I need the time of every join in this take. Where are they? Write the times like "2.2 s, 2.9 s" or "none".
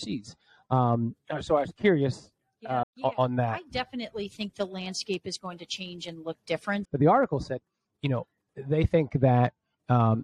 2.8 s, 6.8 s